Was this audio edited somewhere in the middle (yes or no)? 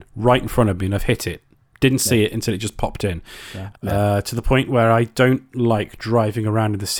yes